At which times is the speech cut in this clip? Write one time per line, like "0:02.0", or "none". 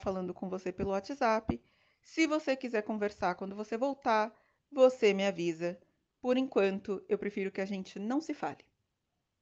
none